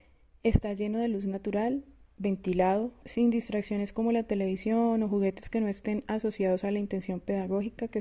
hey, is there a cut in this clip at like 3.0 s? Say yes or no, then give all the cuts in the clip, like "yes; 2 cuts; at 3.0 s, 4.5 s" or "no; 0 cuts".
yes; 1 cut; at 3.0 s